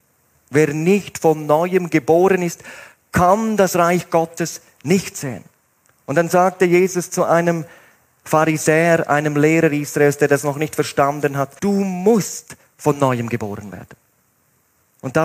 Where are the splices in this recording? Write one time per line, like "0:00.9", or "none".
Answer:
0:11.6

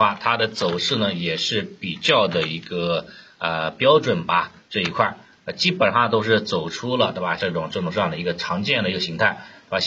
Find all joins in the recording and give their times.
0:07.4

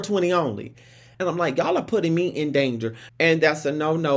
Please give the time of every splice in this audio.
0:01.1
0:03.1

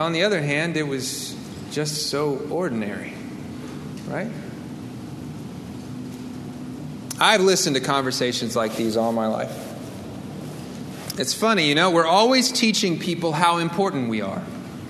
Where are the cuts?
0:11.1

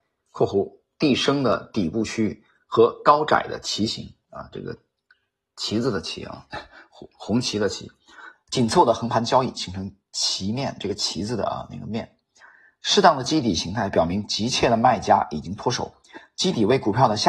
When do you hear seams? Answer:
0:08.3

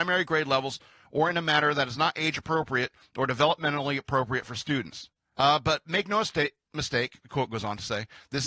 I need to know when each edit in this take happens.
0:05.4

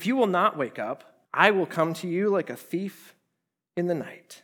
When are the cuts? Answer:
0:01.2

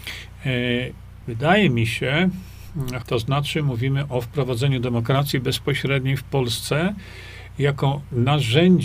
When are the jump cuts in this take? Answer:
0:01.2
0:03.0

